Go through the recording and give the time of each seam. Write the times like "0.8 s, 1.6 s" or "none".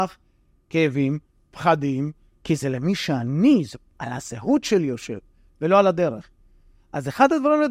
none